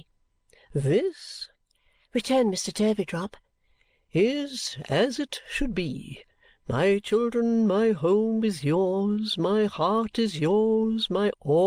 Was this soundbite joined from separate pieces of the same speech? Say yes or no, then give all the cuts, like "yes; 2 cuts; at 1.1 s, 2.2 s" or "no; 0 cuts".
no; 0 cuts